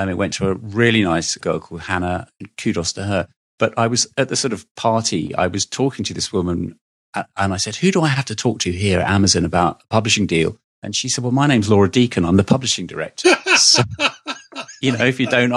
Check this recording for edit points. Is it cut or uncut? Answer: cut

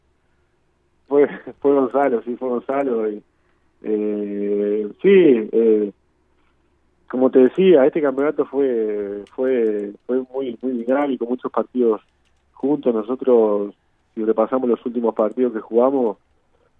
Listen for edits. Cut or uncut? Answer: cut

